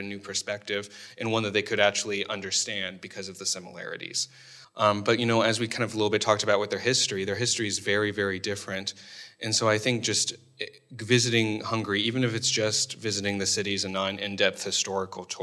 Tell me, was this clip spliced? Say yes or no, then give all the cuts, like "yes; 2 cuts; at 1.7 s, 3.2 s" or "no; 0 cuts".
yes; 1 cut; at 4.6 s